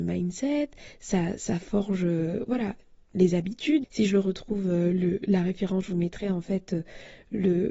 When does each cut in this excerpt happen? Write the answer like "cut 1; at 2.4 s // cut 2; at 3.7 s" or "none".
cut 1; at 3.8 s